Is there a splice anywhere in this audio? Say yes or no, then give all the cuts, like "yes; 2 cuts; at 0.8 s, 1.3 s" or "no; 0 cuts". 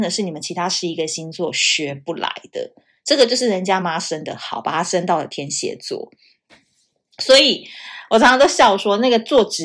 yes; 1 cut; at 3.8 s